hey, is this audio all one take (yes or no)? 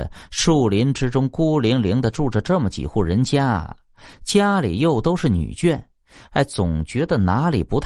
yes